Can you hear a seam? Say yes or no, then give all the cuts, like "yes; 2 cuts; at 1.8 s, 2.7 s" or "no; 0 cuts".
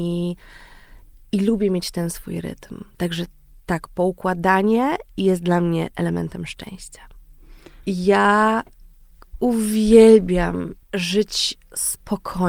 yes; 2 cuts; at 7.8 s, 10.8 s